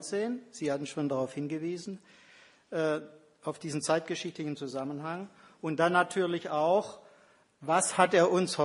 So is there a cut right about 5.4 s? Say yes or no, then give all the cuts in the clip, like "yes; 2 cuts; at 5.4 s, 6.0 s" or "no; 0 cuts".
no; 0 cuts